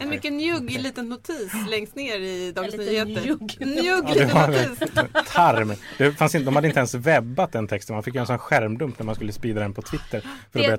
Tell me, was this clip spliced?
no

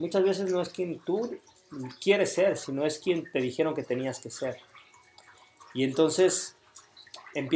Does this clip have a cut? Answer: no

